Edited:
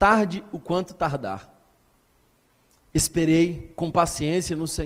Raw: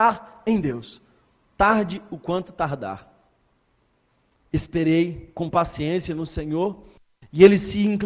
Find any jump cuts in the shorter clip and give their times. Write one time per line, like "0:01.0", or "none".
none